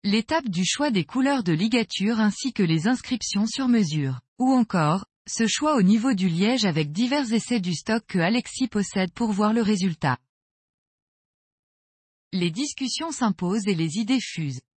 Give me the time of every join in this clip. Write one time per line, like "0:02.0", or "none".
0:04.3
0:12.1